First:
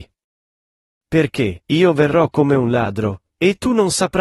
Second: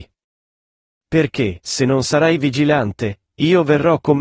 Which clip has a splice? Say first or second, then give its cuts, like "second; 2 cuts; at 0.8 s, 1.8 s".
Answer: first; 1 cut; at 1.6 s